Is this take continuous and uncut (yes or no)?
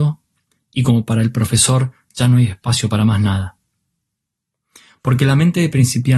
yes